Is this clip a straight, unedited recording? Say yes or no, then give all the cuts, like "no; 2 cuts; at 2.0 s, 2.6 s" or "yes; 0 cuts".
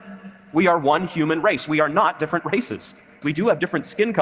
no; 1 cut; at 3.2 s